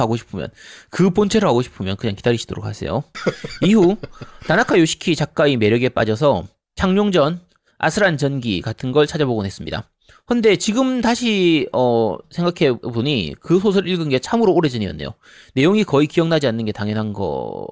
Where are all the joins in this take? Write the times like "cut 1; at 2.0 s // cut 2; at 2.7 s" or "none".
cut 1; at 3.1 s